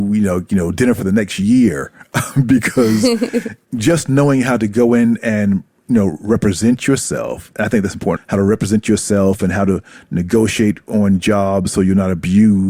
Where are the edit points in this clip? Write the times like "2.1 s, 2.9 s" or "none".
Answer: 8.2 s

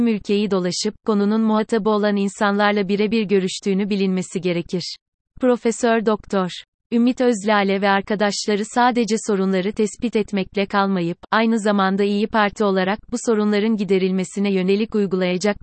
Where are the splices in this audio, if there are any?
5.3 s, 6.8 s

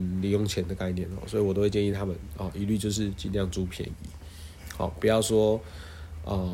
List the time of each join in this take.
none

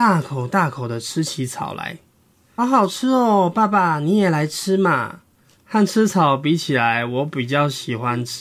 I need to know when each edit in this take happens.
2.6 s, 5.6 s

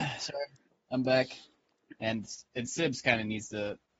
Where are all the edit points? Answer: 1.9 s

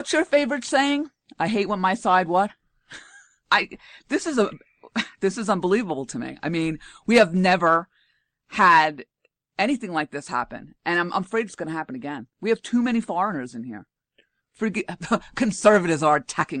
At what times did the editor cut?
3.4 s, 14.4 s

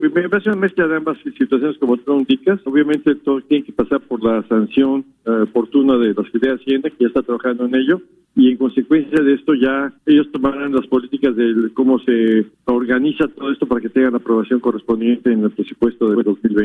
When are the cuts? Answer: 2.7 s

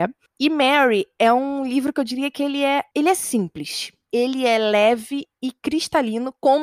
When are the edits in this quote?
none

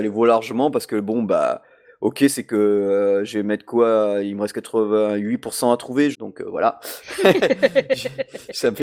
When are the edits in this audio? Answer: 6.1 s

